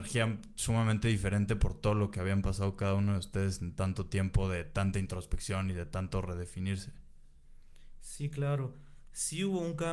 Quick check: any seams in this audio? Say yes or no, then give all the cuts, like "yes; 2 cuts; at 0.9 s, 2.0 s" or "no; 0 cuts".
no; 0 cuts